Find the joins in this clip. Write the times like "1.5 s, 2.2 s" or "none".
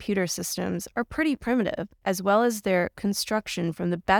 2.0 s